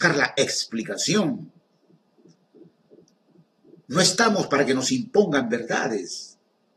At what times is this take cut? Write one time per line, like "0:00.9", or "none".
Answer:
none